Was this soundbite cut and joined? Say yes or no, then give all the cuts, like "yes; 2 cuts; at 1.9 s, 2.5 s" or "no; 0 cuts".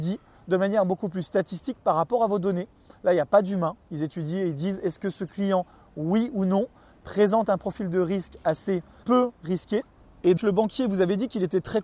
yes; 2 cuts; at 9.0 s, 10.4 s